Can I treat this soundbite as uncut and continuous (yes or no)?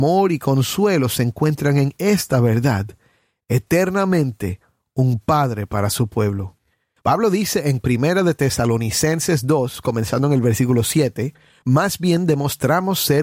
no